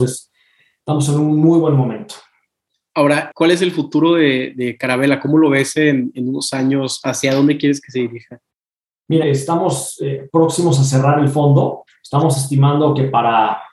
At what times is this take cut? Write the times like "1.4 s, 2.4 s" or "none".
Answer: 3.3 s, 9.2 s, 11.9 s